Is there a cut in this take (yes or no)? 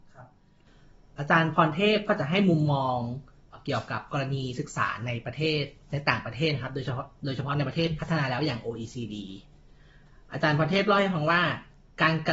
yes